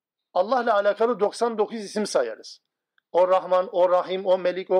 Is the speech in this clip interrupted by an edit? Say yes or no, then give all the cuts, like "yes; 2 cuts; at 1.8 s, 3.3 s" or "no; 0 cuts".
no; 0 cuts